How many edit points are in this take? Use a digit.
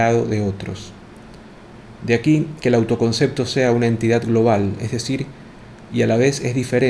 2